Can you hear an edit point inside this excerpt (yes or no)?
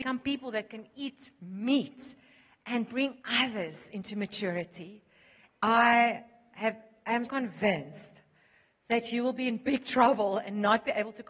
yes